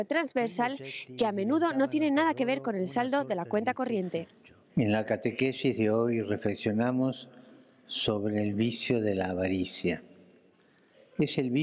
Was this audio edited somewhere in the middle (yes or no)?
no